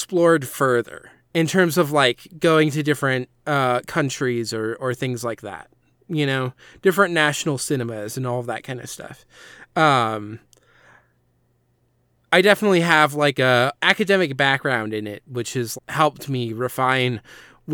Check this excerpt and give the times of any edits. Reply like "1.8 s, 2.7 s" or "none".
13.7 s, 15.8 s